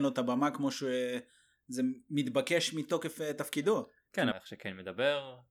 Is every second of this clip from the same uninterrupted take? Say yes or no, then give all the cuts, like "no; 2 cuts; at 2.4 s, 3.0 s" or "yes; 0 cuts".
no; 1 cut; at 4.3 s